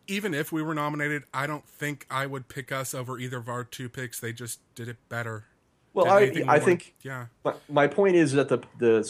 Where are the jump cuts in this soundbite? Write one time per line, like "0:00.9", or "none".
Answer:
none